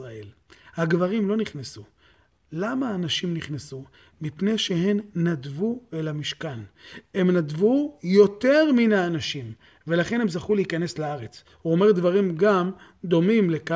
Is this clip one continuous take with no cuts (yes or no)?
yes